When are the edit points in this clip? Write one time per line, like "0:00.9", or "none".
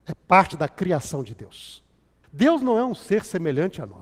0:02.2